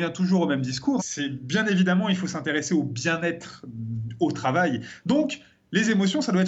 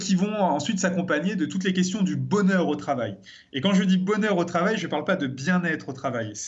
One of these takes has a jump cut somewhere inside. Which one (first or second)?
first